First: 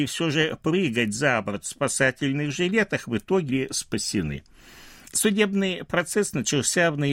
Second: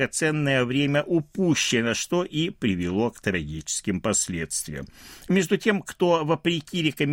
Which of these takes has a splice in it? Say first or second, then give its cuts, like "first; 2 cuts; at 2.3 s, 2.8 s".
first; 1 cut; at 3.5 s